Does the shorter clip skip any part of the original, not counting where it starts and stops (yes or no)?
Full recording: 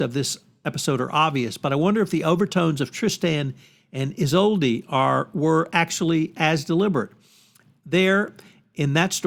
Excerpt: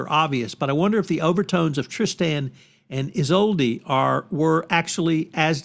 no